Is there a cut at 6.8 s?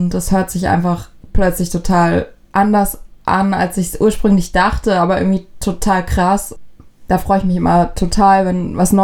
no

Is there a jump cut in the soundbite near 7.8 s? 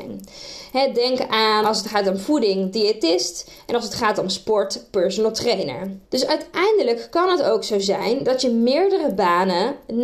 no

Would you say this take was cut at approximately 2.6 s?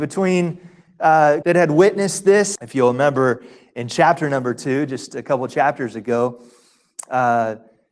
yes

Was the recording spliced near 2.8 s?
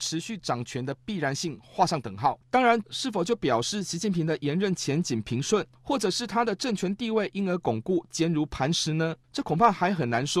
yes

